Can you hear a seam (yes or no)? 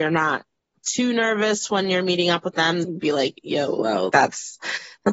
yes